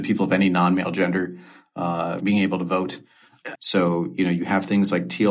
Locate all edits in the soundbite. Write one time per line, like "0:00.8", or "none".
0:02.2
0:03.5

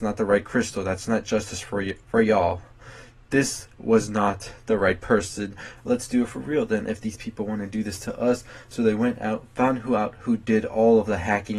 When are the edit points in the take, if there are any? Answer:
0:02.0
0:05.8

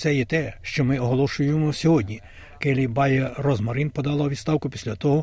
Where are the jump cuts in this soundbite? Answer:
0:02.6

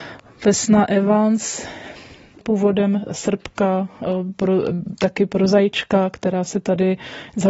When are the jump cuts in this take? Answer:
0:02.4

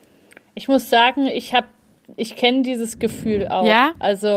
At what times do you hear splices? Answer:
none

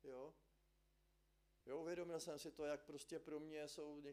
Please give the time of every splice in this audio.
0:01.6

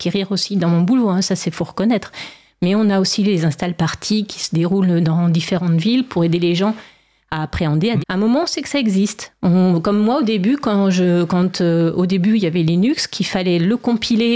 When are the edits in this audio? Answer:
0:08.0

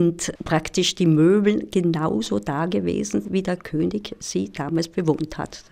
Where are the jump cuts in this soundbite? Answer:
0:03.2

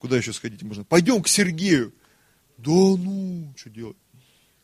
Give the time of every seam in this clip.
0:02.4
0:03.5

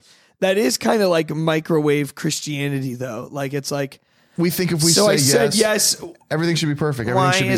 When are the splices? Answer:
none

